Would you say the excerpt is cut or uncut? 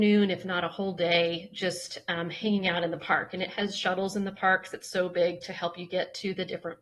uncut